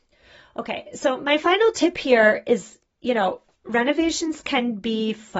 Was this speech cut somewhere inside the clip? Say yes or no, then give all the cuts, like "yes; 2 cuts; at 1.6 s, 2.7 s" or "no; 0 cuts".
no; 0 cuts